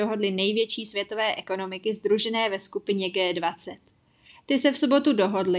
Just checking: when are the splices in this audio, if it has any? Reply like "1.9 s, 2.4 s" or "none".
none